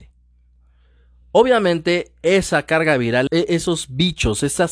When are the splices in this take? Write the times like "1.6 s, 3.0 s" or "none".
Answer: 3.3 s